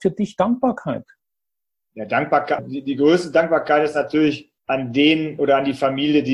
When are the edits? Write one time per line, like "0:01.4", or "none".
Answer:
0:02.6
0:04.6